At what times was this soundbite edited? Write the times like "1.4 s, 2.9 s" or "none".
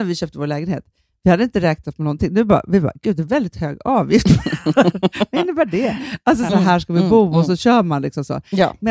6.5 s